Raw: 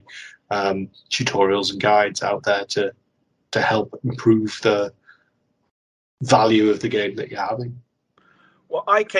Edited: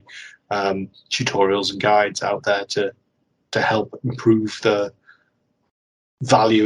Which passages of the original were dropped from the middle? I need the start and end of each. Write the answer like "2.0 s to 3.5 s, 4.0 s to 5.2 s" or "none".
none